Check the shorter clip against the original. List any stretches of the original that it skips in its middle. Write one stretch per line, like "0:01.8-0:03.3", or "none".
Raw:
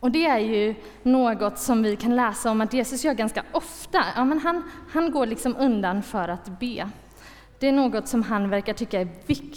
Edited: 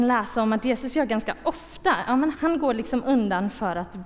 0:04.4-0:04.8